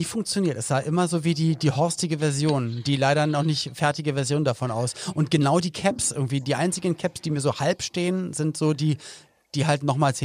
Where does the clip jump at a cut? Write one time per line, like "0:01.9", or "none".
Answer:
none